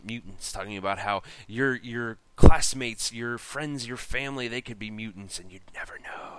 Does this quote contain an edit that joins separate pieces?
no; 0 cuts

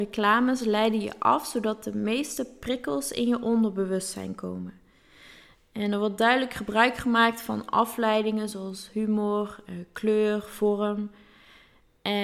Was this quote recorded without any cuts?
yes; 0 cuts

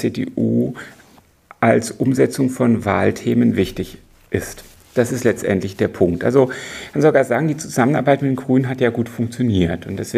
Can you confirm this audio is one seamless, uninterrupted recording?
yes; 0 cuts

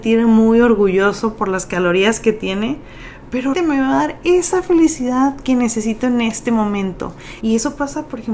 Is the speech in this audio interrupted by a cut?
yes; 2 cuts; at 3.5 s, 7.4 s

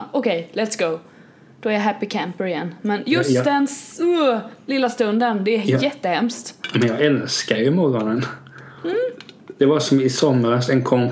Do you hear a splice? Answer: no; 0 cuts

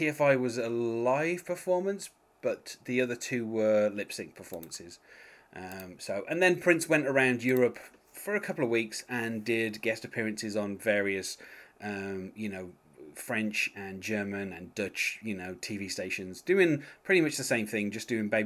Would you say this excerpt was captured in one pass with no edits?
yes; 0 cuts

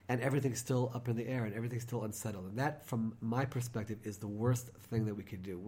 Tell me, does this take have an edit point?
no; 0 cuts

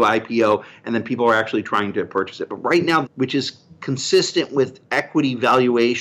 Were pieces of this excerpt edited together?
yes; 1 cut; at 3.0 s

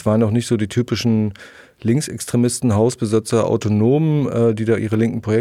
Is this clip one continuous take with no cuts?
yes; 0 cuts

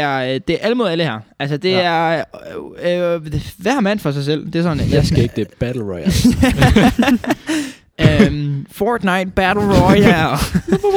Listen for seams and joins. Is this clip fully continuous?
yes; 0 cuts

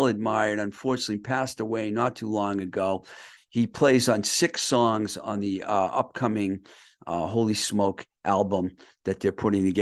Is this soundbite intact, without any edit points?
no; 1 cut; at 3.4 s

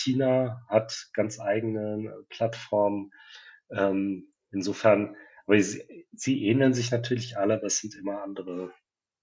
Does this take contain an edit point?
no; 0 cuts

